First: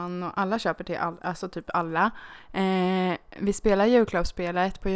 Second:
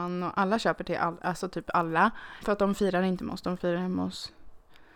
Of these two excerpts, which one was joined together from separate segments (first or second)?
second